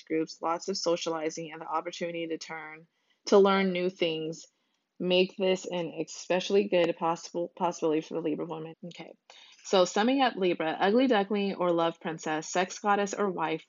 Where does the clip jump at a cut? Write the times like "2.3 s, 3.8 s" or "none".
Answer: 8.7 s